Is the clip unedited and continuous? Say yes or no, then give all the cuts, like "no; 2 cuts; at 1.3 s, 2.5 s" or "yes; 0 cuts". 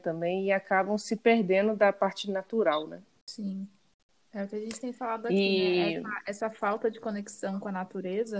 yes; 0 cuts